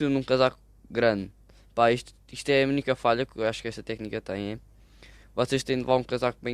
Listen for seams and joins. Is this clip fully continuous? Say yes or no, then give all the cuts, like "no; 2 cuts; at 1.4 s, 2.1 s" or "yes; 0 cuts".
yes; 0 cuts